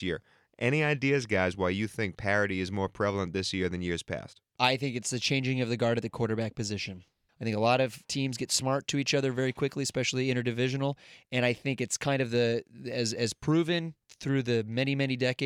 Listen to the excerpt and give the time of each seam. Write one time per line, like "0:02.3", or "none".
0:07.3

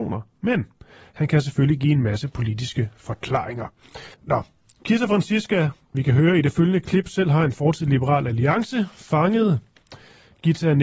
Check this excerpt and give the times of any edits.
0:04.1
0:05.9

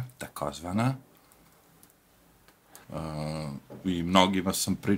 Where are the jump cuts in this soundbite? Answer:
0:02.8

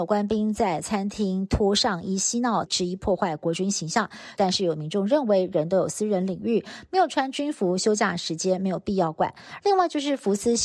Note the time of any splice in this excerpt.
0:02.6
0:04.4
0:09.6

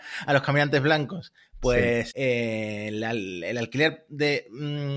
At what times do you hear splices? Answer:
0:02.1

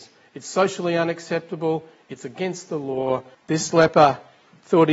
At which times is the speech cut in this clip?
0:03.3

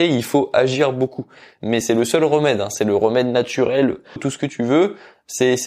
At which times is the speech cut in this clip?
0:01.8
0:04.2

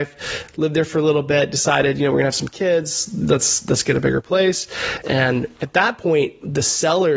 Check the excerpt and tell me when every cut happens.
0:05.0

